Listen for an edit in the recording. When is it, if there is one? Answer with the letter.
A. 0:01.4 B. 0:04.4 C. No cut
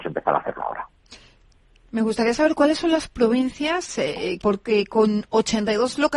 B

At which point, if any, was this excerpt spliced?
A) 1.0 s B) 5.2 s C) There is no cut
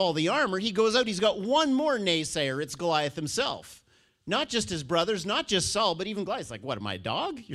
C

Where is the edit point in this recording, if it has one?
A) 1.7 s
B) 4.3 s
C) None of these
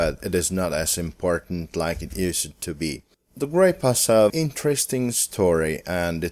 B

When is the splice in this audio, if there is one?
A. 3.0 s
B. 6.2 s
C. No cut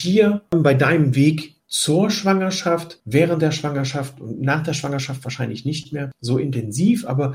C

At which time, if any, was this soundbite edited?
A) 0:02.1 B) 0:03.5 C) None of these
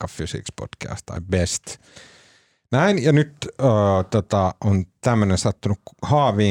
C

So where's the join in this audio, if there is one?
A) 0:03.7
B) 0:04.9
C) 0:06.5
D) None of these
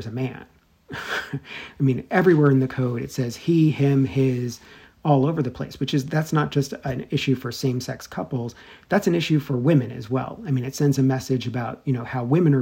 D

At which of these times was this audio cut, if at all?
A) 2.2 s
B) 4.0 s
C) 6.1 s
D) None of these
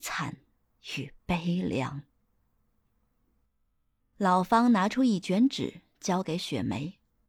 B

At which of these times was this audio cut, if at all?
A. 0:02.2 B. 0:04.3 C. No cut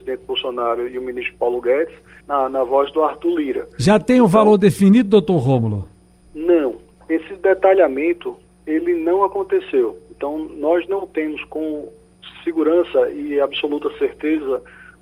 A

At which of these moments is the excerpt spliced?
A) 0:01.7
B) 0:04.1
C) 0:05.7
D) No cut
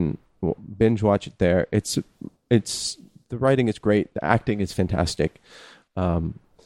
D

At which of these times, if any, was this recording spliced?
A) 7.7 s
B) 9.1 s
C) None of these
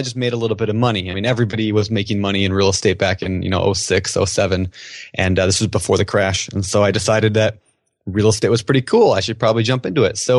C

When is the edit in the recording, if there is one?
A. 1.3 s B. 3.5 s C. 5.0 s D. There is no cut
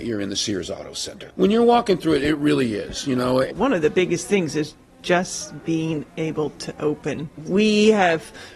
A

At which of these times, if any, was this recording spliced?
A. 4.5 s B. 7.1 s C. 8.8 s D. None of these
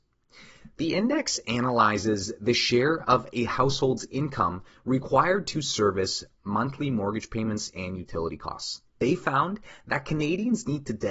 C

